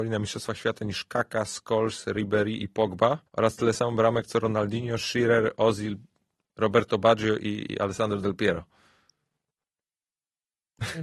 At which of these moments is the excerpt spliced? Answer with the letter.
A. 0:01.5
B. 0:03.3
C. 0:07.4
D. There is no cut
B